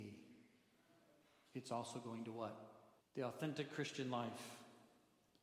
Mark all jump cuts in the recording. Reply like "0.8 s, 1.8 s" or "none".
3.0 s